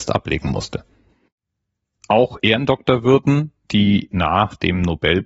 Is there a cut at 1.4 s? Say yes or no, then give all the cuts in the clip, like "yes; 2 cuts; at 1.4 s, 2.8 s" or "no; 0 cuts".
no; 0 cuts